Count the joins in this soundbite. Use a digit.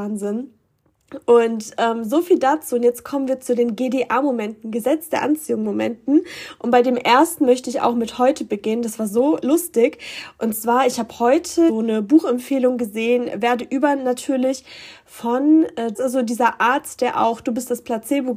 2